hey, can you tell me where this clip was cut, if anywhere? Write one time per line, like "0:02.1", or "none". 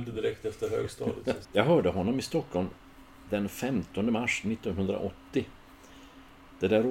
0:01.4